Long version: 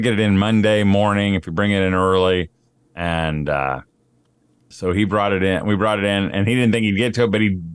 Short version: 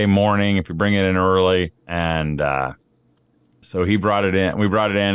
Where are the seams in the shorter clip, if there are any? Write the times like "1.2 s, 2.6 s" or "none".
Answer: 1.8 s

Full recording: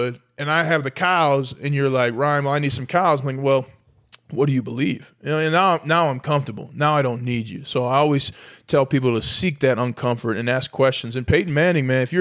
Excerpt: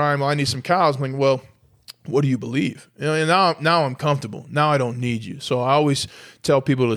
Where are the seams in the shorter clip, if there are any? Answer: none

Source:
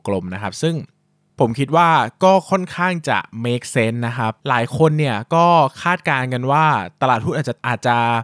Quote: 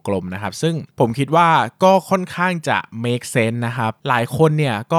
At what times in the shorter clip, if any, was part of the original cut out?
0.9 s

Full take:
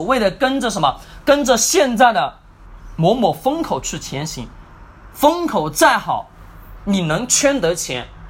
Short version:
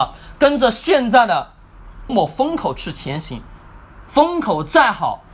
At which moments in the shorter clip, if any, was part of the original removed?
2.1 s

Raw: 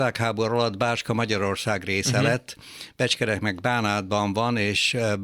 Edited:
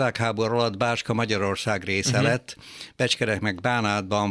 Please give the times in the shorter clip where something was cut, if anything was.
none

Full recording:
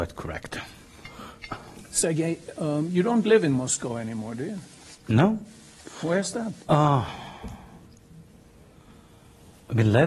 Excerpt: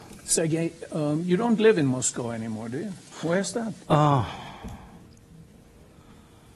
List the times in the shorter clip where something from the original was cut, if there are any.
3.1 s

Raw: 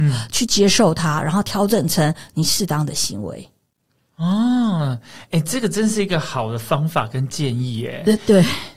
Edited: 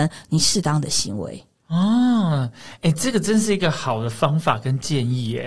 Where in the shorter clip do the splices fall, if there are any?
1.5 s

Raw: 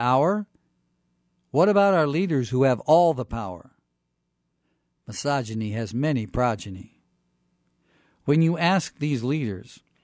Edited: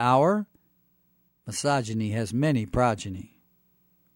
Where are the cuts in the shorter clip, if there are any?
1.3 s

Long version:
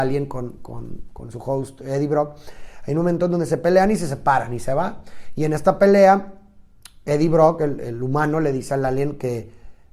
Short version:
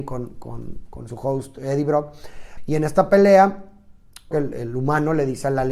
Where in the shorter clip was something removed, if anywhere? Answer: 2.6 s, 4.3 s

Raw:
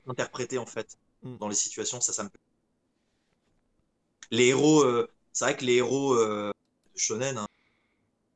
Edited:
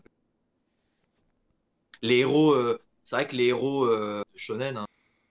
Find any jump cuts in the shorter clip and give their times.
4.3 s

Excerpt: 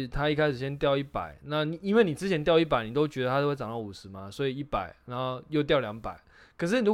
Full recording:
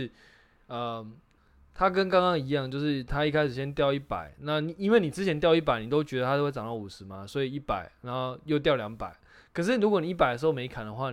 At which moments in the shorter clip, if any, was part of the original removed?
none

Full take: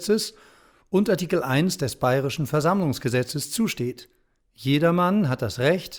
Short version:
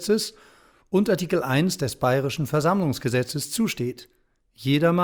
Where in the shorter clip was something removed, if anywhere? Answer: none

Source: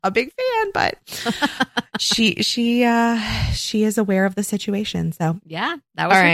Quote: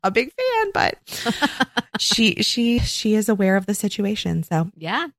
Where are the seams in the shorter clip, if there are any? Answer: 2.8 s

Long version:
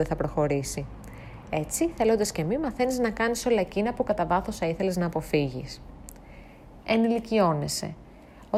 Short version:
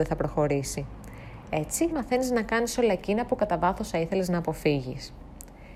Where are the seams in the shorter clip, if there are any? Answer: 1.9 s

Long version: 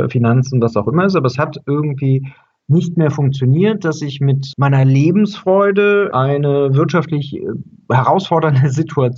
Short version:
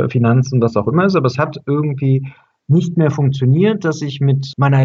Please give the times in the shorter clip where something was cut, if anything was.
none

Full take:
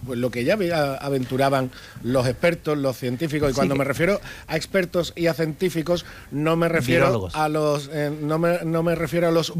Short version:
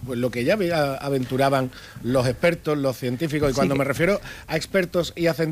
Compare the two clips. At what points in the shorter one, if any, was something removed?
none

